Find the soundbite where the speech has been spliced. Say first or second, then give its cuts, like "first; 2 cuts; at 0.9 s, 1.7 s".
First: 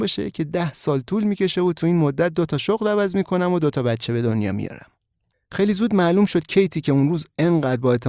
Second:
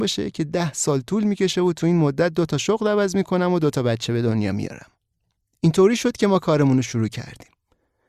first; 1 cut; at 5.3 s